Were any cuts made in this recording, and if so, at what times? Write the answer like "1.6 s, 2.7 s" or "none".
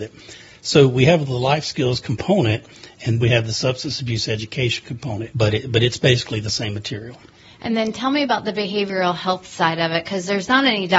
3.2 s, 5.3 s